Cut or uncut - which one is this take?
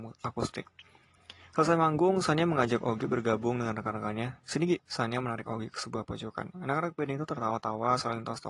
cut